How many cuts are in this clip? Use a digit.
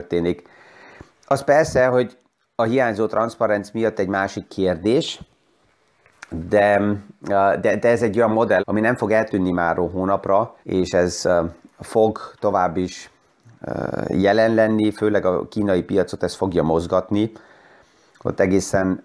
2